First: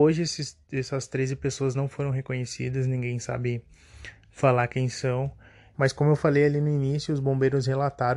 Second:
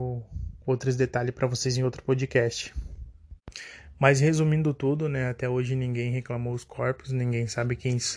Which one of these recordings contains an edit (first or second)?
first